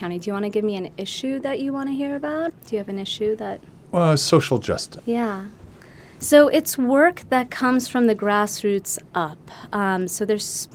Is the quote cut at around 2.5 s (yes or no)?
yes